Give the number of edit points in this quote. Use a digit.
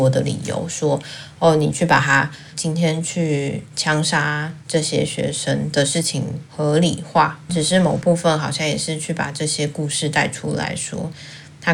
1